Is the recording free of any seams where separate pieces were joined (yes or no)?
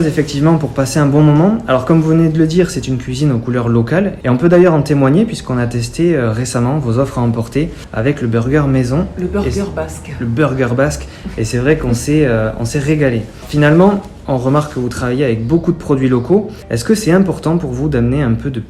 yes